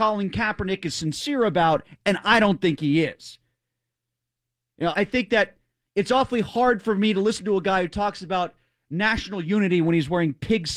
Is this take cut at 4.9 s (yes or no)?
yes